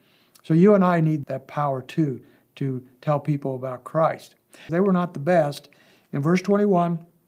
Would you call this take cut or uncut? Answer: cut